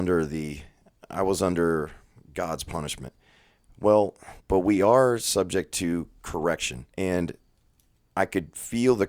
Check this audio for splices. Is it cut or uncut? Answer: cut